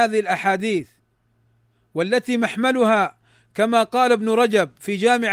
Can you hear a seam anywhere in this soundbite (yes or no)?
no